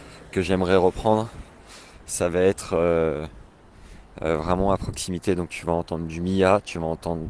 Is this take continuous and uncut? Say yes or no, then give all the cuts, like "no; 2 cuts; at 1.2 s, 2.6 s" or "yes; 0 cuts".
yes; 0 cuts